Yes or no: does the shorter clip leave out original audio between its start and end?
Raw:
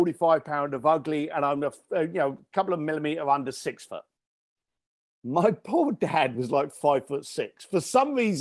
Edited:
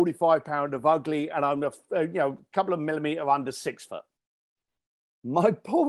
no